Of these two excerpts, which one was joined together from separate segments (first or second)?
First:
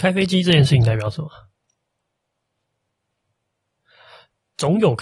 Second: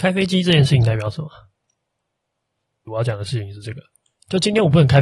second